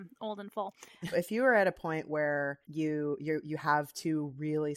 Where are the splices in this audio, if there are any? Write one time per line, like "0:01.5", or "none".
0:01.1
0:02.6